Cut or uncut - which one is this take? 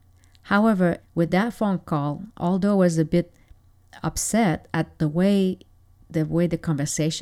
cut